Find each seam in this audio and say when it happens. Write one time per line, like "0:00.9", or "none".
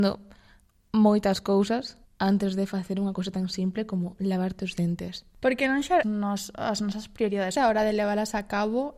0:02.0
0:06.0
0:07.6